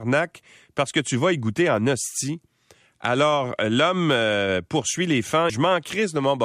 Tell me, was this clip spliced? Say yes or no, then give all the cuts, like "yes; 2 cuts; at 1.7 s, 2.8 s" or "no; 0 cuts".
yes; 1 cut; at 5.5 s